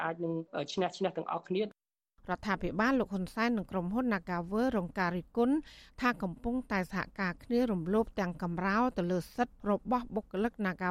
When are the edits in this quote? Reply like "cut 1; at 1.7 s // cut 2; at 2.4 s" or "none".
cut 1; at 9.6 s